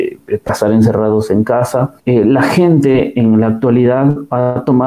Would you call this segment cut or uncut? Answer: cut